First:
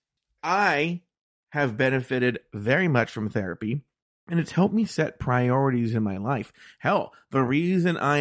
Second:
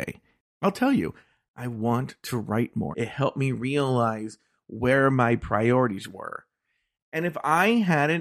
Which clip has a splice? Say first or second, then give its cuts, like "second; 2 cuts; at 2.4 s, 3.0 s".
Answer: second; 2 cuts; at 2.9 s, 7.0 s